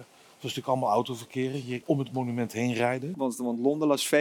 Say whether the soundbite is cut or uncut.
cut